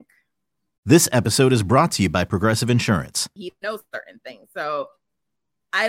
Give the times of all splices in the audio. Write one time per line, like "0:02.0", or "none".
0:03.4